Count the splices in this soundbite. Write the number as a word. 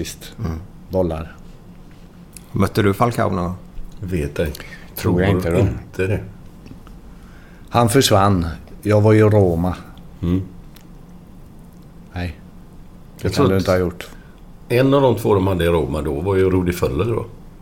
zero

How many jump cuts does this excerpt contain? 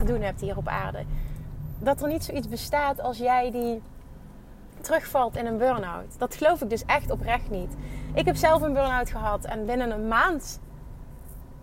zero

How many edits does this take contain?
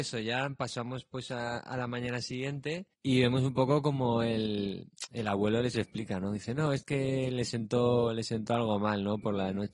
one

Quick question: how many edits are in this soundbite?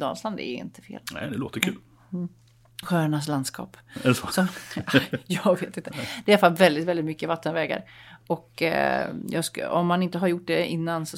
one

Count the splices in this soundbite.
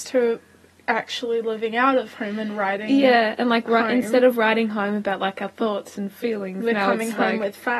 zero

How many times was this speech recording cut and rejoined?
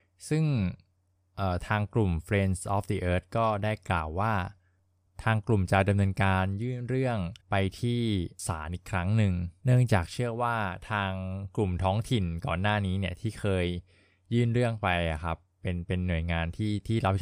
one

